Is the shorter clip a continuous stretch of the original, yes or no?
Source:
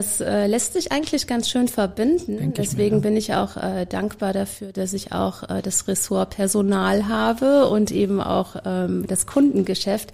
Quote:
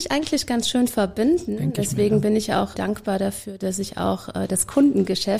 no